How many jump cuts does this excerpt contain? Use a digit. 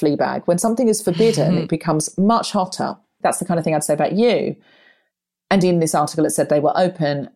1